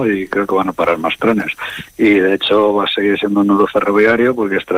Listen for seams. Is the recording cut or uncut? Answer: uncut